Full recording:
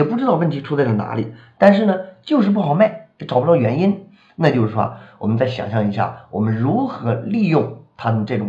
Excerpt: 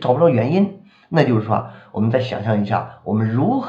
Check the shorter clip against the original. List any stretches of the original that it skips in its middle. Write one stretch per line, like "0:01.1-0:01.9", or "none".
none